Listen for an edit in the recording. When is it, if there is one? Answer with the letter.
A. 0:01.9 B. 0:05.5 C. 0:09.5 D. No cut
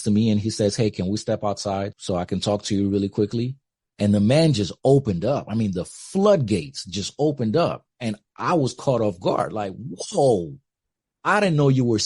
A